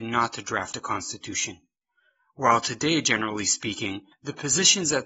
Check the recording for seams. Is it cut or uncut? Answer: cut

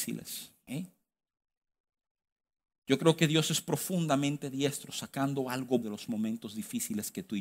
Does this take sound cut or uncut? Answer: cut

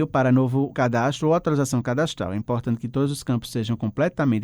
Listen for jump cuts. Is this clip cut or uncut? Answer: uncut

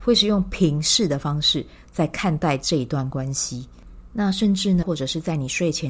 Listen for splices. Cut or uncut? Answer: cut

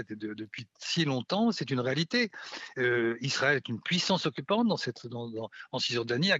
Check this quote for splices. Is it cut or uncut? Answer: uncut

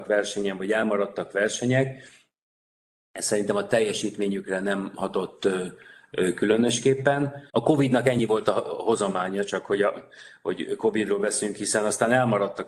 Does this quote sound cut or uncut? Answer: cut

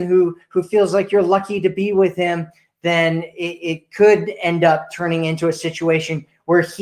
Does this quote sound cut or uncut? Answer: uncut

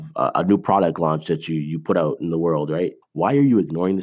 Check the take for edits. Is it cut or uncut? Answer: cut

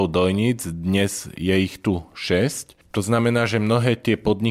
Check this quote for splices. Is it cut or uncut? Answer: uncut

